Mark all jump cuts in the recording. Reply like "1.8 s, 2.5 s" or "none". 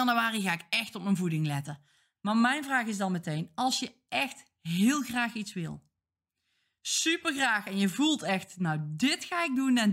2.2 s